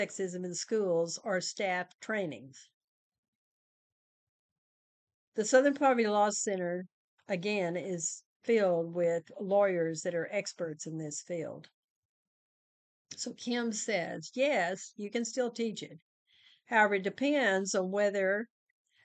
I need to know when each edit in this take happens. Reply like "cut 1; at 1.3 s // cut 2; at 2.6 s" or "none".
none